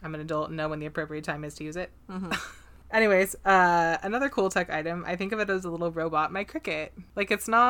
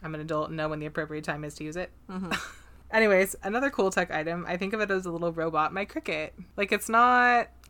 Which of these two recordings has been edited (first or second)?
second